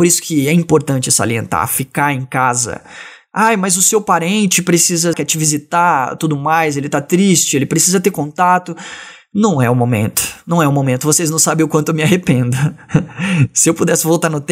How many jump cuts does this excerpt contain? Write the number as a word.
one